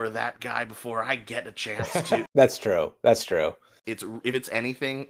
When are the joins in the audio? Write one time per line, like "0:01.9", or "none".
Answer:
0:02.3
0:03.8